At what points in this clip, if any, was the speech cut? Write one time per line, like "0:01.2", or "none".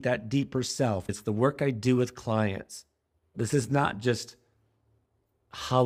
0:01.1
0:03.3